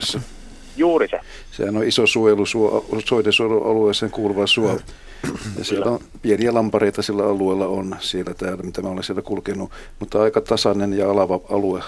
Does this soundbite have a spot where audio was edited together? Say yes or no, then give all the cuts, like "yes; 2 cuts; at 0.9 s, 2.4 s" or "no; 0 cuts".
no; 0 cuts